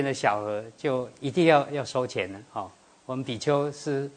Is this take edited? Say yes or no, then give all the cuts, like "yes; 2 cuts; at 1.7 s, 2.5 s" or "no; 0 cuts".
no; 0 cuts